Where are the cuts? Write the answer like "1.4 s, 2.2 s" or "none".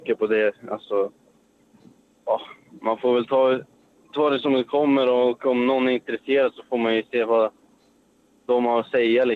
none